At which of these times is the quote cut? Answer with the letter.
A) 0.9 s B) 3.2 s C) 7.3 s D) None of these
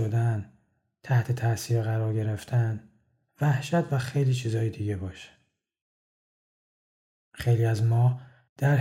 B